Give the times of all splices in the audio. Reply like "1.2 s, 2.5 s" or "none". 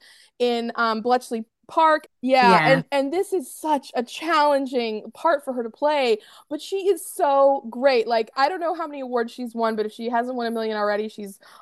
2.1 s, 8.3 s